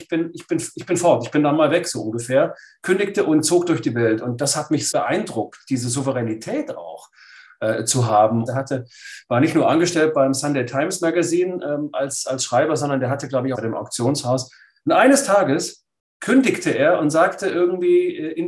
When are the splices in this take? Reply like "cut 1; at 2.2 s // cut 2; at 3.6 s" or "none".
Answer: cut 1; at 4.9 s // cut 2; at 8.5 s // cut 3; at 13.5 s